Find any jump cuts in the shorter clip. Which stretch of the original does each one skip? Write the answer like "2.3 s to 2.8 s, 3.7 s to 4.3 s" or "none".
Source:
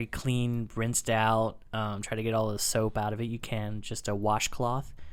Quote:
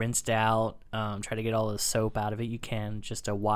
none

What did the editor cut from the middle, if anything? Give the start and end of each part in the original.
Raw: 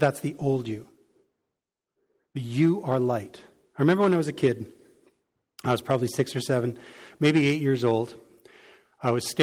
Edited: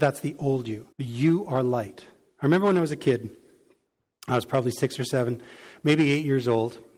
0.9 s to 2.3 s

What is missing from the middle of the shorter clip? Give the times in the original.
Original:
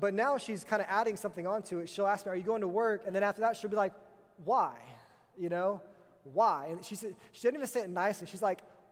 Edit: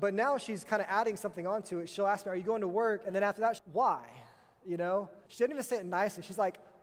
3.6 s to 4.3 s, 6.0 s to 7.3 s

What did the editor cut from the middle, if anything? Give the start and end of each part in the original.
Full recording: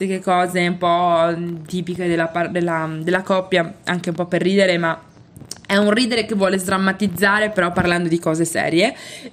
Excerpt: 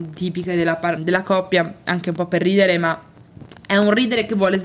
2.5 s to 3.0 s

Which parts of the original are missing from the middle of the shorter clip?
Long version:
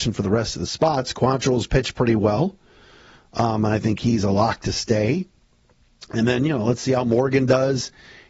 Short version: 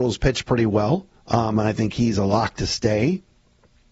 2.7 s to 3.2 s

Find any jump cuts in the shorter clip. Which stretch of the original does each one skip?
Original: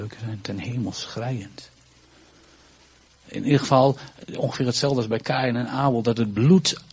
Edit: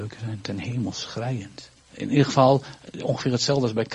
1.8 s to 3.1 s

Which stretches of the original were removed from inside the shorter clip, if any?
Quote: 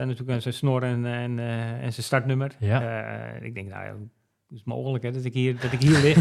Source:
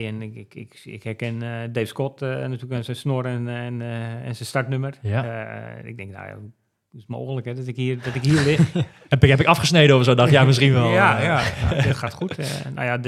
none

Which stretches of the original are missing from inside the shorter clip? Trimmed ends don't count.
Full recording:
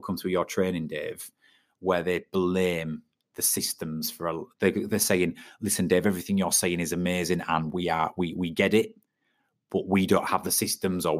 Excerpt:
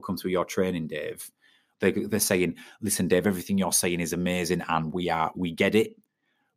1.7 s to 4.5 s, 8.1 s to 8.3 s

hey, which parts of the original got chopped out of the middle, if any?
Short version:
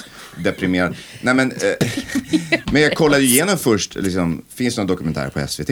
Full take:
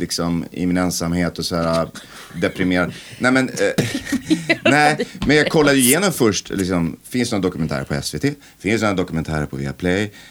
4.6 s to 5.2 s

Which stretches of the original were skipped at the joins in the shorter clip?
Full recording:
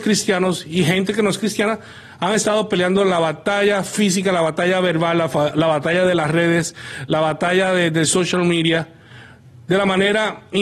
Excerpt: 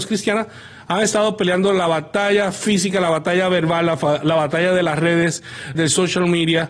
7.1 s to 7.9 s

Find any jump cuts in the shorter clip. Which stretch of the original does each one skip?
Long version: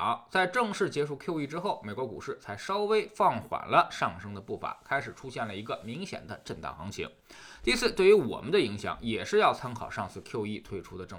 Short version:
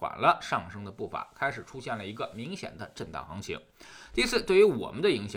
none

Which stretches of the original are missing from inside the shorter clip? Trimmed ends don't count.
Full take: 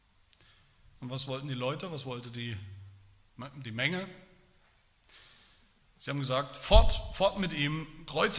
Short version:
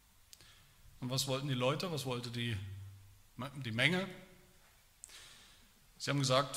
none

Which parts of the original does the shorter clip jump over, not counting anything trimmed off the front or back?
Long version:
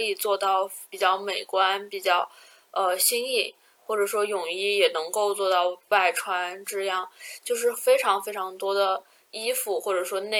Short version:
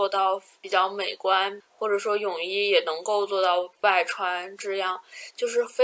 1.9 s to 3.7 s

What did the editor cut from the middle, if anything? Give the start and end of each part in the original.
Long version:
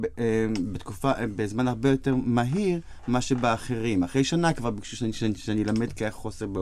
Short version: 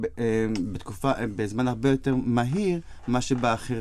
none

